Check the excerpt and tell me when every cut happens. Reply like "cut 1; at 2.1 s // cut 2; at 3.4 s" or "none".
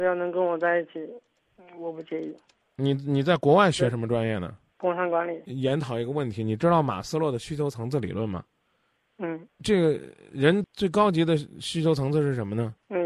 cut 1; at 9.5 s // cut 2; at 10.6 s

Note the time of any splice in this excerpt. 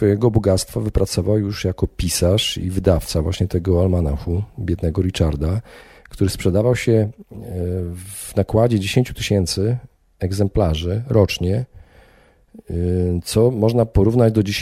none

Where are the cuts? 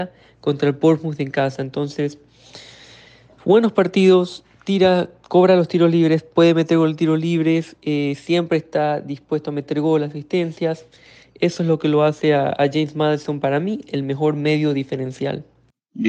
none

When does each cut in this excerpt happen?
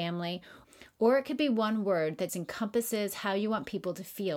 cut 1; at 2.3 s

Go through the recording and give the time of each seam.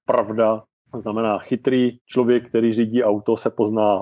cut 1; at 2.0 s

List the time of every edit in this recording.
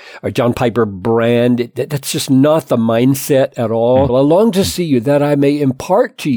cut 1; at 4.1 s

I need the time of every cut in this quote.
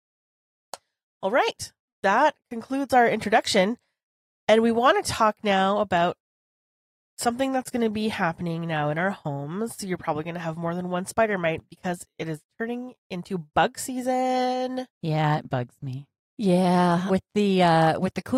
cut 1; at 14.9 s // cut 2; at 17.1 s

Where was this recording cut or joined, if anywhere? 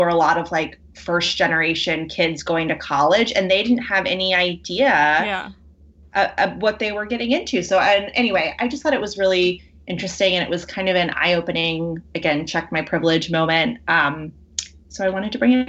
none

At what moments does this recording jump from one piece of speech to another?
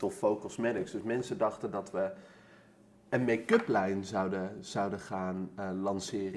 none

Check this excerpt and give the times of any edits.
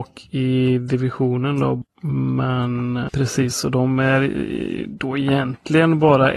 cut 1; at 1.8 s // cut 2; at 3.1 s

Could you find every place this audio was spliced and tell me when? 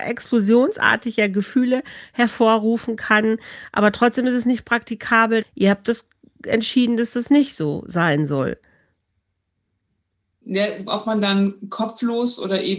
cut 1; at 5.4 s // cut 2; at 10.9 s

